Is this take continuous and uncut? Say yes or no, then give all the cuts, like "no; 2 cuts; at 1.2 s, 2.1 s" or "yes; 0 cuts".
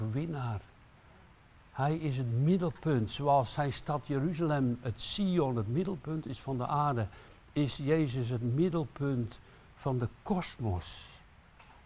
yes; 0 cuts